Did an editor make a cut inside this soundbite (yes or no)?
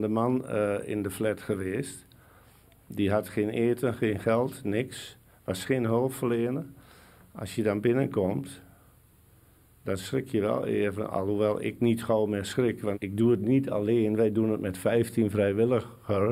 yes